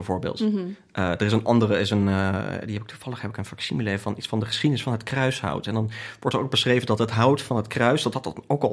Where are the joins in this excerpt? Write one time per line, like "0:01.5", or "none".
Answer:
none

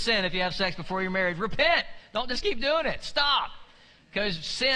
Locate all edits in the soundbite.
none

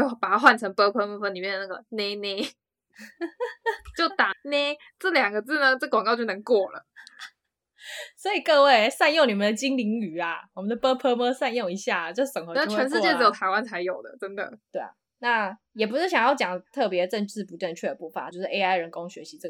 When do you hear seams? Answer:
0:04.3
0:18.3

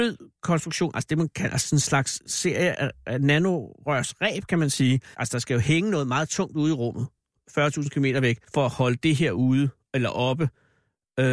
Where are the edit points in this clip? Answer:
0:02.7
0:05.1
0:08.4

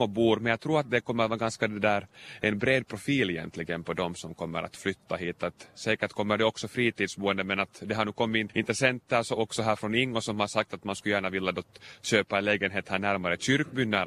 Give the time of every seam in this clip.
none

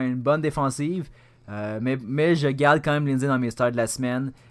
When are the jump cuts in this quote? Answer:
none

